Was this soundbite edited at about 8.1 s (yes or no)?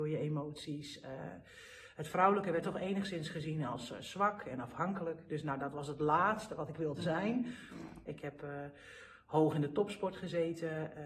yes